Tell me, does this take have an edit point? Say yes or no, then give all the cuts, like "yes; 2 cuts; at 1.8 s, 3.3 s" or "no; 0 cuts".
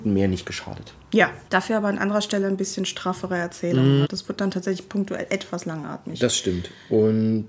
yes; 2 cuts; at 1.5 s, 4.0 s